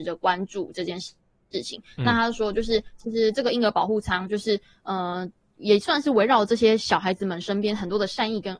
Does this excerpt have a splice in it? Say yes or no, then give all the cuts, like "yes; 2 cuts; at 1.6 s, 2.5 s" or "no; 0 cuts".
no; 0 cuts